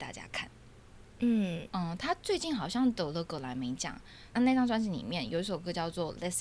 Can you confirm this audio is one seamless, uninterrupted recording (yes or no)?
no